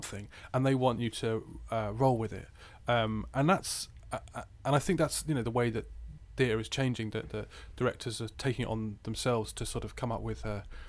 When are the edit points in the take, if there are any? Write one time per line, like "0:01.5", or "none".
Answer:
none